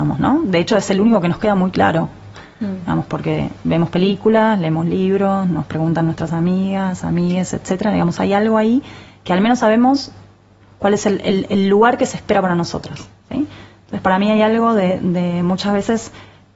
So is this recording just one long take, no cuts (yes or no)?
yes